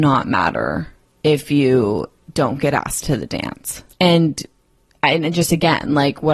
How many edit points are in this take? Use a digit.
1